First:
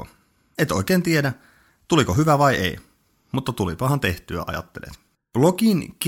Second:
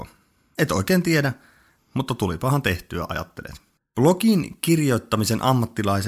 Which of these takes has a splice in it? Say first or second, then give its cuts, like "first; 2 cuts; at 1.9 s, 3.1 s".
second; 1 cut; at 1.8 s